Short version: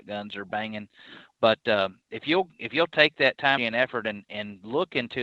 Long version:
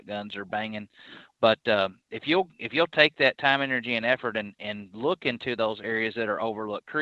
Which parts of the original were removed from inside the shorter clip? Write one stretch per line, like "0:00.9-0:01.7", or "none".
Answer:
0:03.6-0:03.9